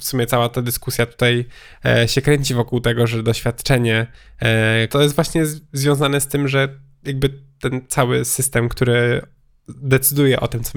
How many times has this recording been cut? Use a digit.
1